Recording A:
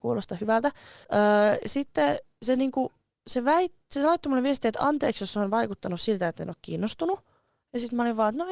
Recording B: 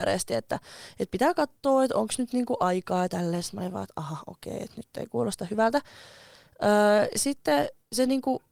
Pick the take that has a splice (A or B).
A